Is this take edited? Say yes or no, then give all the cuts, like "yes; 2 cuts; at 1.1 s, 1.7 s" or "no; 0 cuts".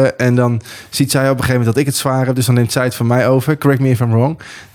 no; 0 cuts